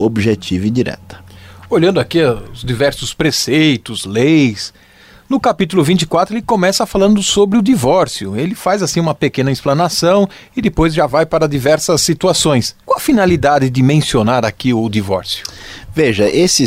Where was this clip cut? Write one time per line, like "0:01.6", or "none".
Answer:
0:12.8